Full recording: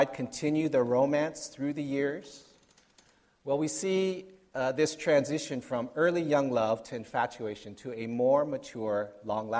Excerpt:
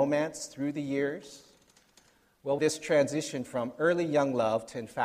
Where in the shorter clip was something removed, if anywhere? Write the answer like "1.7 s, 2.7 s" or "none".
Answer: 2.6 s